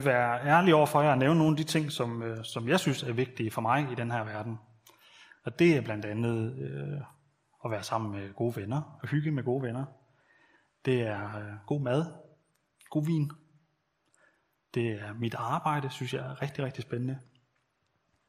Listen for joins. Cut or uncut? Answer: uncut